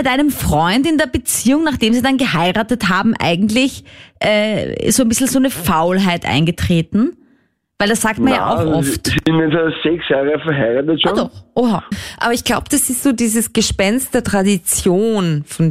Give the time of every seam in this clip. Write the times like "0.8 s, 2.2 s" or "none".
11.9 s